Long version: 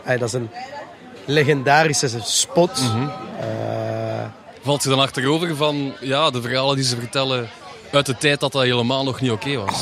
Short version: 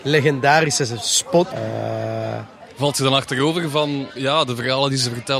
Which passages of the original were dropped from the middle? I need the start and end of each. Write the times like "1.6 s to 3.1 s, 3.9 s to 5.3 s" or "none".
2.7 s to 3.4 s